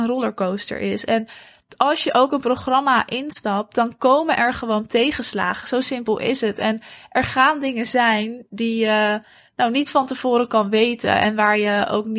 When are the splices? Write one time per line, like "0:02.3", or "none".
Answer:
none